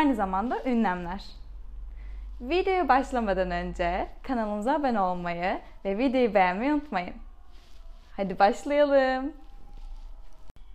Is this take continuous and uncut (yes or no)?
yes